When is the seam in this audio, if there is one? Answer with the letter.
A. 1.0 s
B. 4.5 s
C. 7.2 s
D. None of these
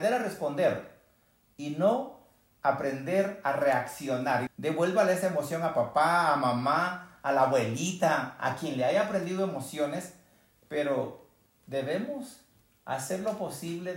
B